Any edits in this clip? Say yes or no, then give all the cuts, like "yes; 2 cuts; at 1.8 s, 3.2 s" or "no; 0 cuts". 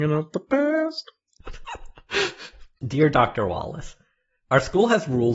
yes; 1 cut; at 1.4 s